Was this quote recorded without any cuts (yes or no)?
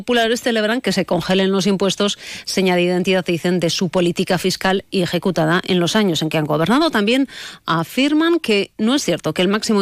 yes